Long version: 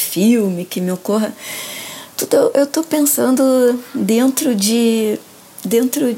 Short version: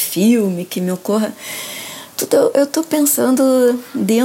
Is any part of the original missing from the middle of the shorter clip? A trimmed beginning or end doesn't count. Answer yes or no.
no